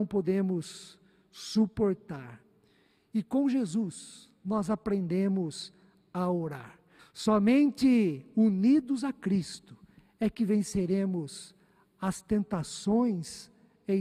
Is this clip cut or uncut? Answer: cut